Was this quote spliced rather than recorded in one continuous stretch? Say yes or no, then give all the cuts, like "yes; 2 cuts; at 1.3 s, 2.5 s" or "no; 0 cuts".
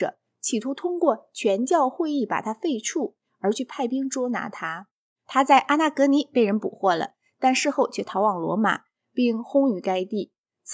no; 0 cuts